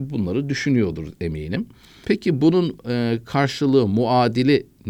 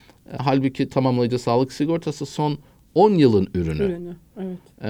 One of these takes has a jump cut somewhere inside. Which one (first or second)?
first